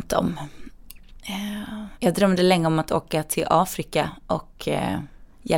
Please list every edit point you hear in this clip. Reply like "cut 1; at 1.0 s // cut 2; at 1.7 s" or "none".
none